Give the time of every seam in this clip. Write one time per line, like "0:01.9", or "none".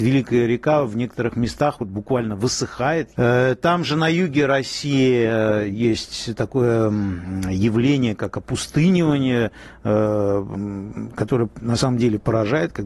0:03.1